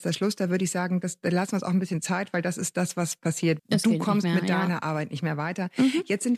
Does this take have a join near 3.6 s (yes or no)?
yes